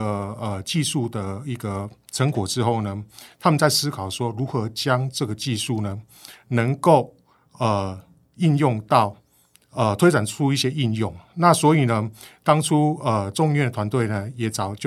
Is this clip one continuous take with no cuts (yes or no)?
yes